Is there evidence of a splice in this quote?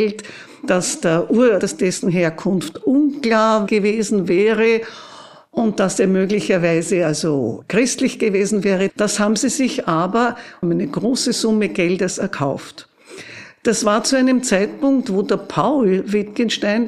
yes; 3 cuts; at 1.6 s, 8.9 s, 10.6 s

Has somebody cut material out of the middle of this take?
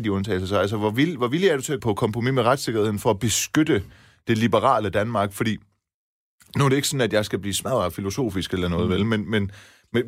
yes; 1 cut; at 1.8 s

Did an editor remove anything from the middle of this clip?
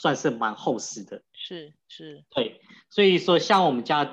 no; 0 cuts

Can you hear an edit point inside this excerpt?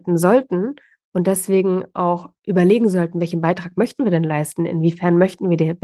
no; 0 cuts

